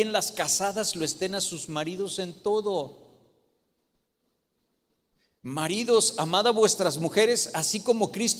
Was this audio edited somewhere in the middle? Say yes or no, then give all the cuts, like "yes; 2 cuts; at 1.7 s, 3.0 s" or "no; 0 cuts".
no; 0 cuts